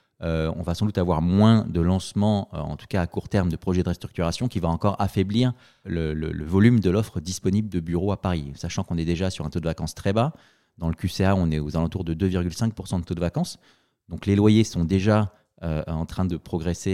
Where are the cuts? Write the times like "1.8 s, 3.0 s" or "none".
5.8 s